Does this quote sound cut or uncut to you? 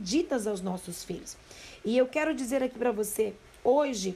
uncut